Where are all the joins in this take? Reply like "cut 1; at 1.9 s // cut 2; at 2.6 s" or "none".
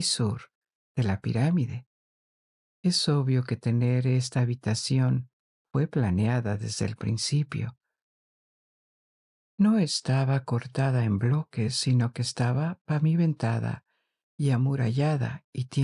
none